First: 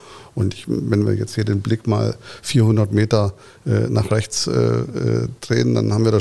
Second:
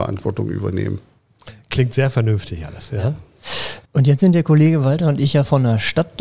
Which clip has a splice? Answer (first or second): second